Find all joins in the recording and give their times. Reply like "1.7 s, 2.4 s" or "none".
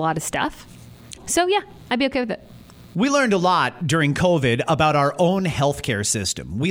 1.2 s